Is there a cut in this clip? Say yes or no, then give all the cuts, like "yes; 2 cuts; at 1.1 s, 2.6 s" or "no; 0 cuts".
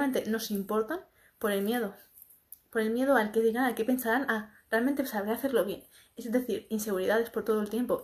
no; 0 cuts